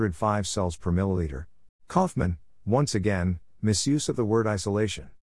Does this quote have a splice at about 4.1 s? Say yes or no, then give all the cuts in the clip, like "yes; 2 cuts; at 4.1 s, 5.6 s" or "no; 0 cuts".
no; 1 cut; at 1.7 s